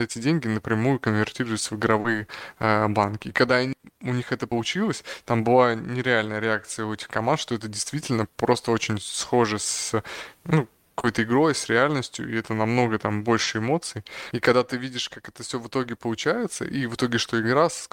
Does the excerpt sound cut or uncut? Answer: cut